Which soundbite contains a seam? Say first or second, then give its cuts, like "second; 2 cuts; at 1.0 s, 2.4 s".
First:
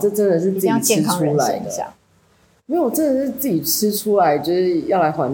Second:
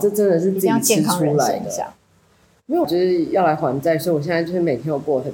second; 1 cut; at 2.8 s